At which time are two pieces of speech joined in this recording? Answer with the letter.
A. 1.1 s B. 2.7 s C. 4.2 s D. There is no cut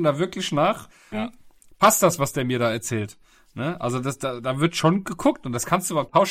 A